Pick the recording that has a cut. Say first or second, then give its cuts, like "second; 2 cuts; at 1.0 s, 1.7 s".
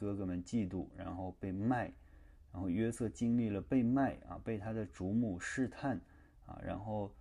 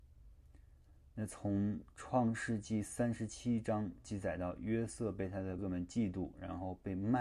second; 1 cut; at 5.6 s